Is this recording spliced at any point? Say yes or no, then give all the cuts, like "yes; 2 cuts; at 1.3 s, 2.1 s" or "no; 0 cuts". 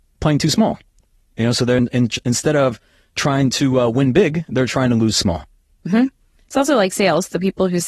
no; 0 cuts